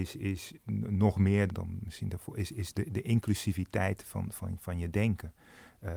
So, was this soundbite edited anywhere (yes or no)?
yes